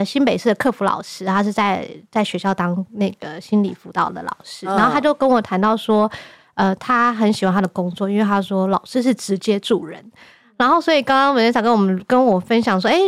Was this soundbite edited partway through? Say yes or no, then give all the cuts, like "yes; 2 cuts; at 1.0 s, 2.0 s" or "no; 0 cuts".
no; 0 cuts